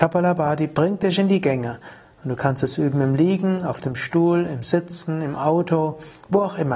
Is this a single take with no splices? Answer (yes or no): yes